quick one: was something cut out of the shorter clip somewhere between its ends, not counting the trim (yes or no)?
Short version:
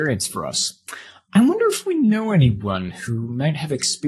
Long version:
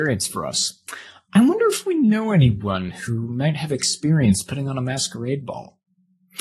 no